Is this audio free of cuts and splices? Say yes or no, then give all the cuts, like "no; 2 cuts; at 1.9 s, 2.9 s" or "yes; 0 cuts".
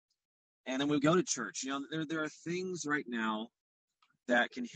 yes; 0 cuts